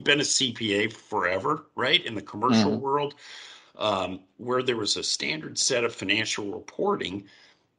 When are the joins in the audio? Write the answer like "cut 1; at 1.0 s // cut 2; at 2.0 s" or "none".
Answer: none